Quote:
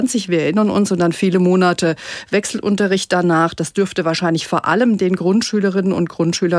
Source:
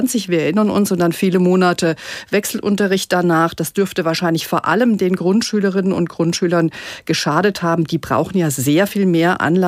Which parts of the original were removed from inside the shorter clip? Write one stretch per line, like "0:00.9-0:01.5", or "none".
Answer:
none